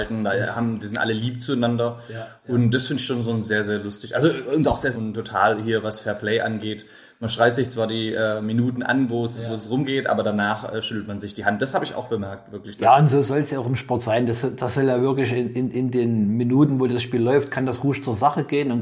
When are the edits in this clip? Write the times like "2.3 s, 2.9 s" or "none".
4.9 s